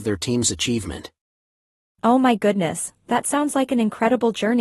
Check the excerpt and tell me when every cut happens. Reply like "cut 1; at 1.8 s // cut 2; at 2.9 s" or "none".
none

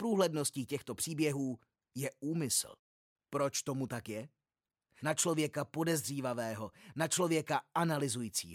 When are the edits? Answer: cut 1; at 5.0 s

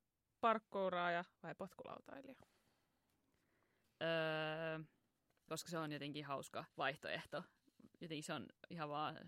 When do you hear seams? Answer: cut 1; at 3.8 s // cut 2; at 5.5 s // cut 3; at 6.7 s

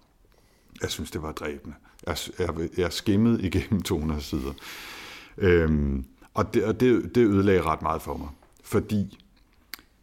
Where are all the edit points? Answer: none

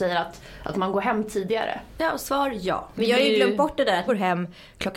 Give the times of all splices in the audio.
cut 1; at 4.1 s

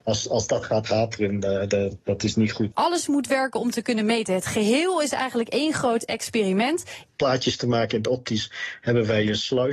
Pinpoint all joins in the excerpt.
cut 1; at 2.7 s // cut 2; at 7.1 s

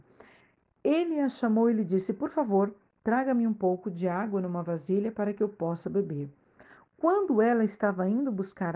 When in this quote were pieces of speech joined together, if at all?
none

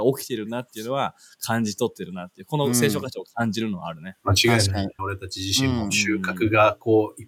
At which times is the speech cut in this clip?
cut 1; at 5.0 s

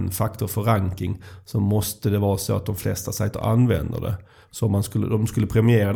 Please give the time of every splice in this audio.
cut 1; at 4.4 s

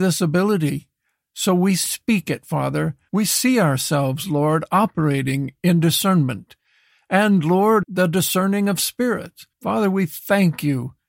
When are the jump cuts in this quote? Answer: cut 1; at 3.1 s // cut 2; at 7.8 s // cut 3; at 9.5 s

